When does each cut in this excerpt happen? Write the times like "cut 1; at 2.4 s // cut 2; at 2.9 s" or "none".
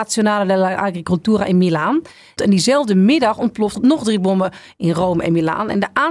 cut 1; at 2.4 s // cut 2; at 3.7 s